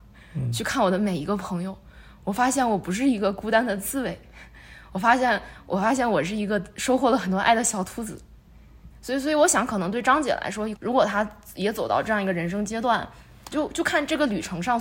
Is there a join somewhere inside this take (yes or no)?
yes